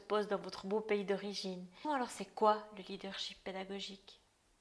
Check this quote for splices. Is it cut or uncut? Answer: cut